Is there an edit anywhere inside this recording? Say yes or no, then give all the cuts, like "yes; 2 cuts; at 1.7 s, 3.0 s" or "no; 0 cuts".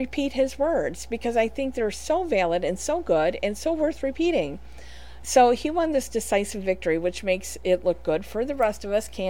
yes; 1 cut; at 5.2 s